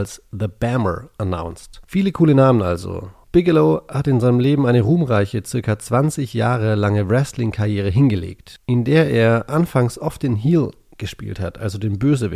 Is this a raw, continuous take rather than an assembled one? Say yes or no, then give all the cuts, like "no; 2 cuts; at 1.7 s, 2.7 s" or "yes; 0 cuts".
yes; 0 cuts